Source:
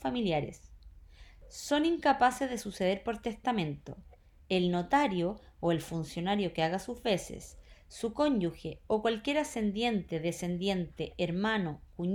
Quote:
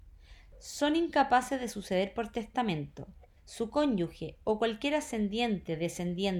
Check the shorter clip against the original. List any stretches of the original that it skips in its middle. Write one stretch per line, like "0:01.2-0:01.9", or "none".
0:04.3-0:07.8